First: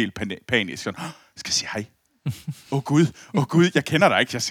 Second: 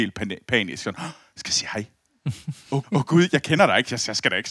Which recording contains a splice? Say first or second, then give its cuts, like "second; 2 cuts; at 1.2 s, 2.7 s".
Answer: second; 1 cut; at 2.8 s